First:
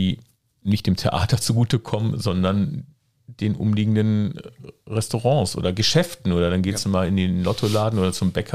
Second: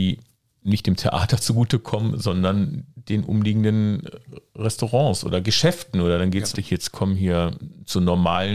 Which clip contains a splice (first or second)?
second